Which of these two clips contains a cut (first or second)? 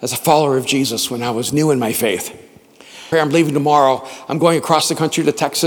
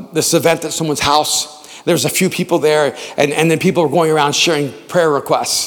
first